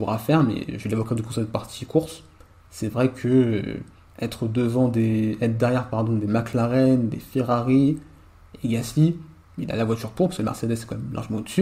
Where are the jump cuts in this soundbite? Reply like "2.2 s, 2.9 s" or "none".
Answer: 9.5 s